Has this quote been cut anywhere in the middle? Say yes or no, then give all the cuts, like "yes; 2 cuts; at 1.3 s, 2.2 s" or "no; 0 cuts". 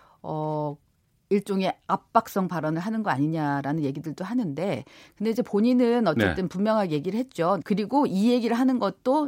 yes; 1 cut; at 7.6 s